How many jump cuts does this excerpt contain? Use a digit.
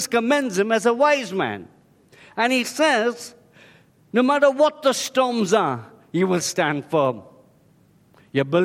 2